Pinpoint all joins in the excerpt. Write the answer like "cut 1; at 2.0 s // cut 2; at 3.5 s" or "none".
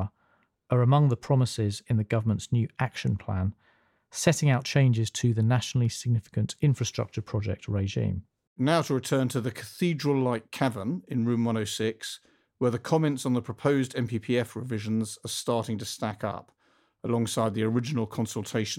cut 1; at 8.5 s